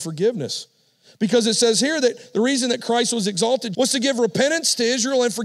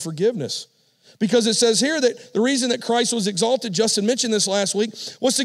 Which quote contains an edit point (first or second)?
first